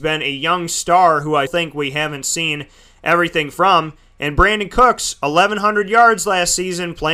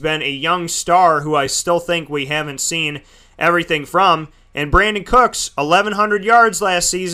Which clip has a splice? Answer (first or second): first